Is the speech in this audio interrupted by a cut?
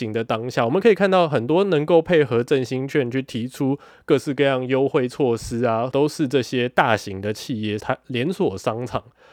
yes; 2 cuts; at 5.9 s, 7.8 s

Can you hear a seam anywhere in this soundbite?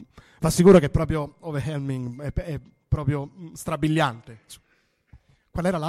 no; 0 cuts

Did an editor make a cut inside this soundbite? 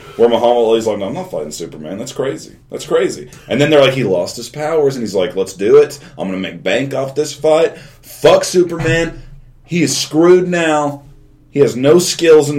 no; 0 cuts

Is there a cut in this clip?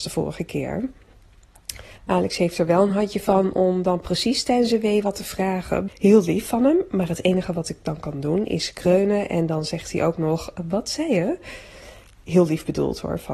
yes; 2 cuts; at 2.0 s, 5.9 s

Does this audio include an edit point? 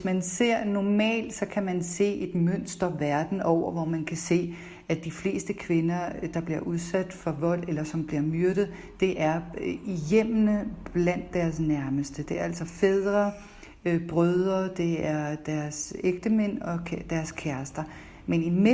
no; 0 cuts

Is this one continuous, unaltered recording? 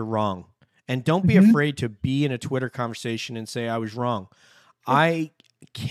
yes; 0 cuts

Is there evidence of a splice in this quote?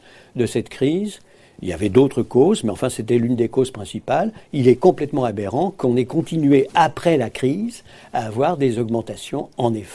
no; 0 cuts

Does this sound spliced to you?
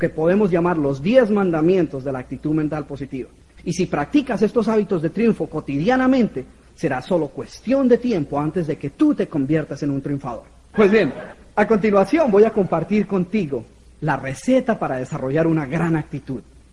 yes; 2 cuts; at 3.6 s, 10.7 s

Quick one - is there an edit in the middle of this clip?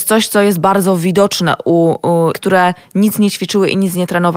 yes; 1 cut; at 2.3 s

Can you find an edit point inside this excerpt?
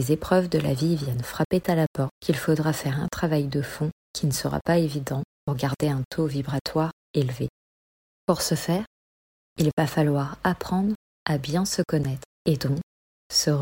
no; 0 cuts

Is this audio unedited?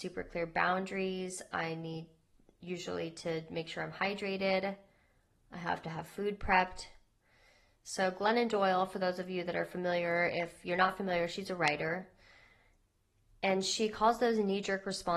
yes; 0 cuts

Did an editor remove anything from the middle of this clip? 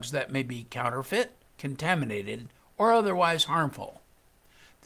yes; 1 cut; at 1.4 s

